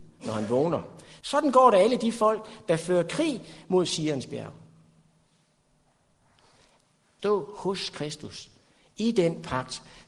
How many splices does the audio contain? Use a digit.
2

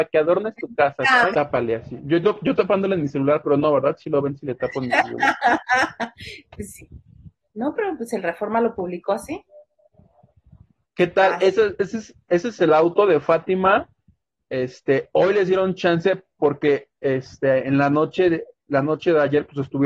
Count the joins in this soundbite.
1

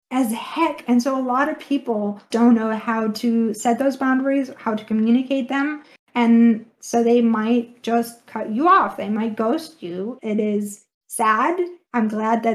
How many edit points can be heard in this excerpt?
2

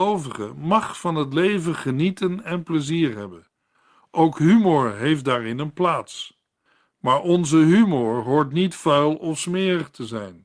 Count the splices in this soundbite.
0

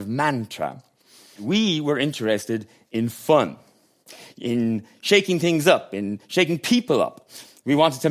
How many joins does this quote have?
1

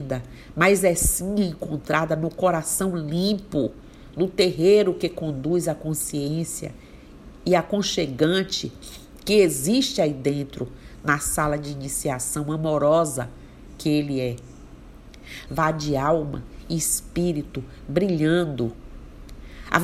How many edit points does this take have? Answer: 1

